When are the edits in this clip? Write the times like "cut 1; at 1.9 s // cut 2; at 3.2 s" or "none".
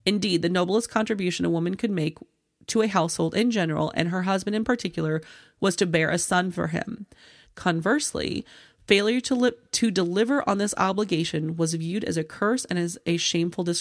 cut 1; at 7.4 s